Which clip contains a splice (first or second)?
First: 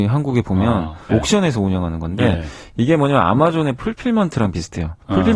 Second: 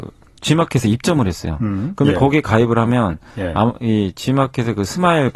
first